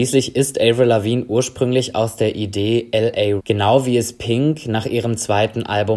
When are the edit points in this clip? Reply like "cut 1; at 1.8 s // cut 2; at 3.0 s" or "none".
cut 1; at 3.4 s

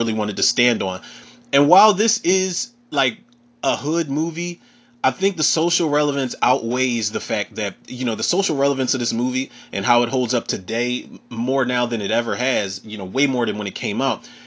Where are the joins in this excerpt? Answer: none

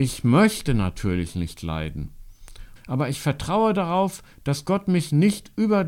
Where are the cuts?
cut 1; at 2.8 s

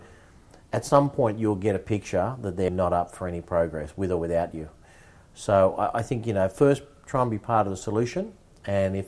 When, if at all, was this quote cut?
cut 1; at 2.7 s

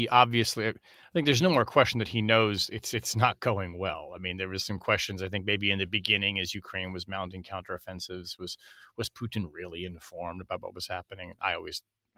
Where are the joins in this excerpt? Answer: none

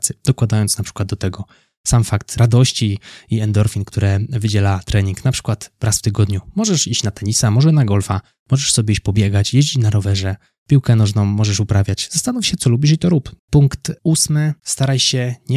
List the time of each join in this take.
cut 1; at 13.4 s // cut 2; at 14.6 s

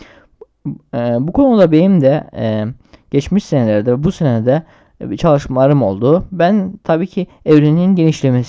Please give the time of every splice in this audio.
none

